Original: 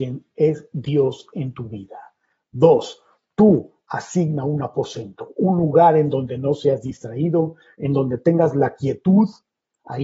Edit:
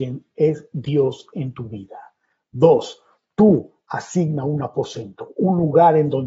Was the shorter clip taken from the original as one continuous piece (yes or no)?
yes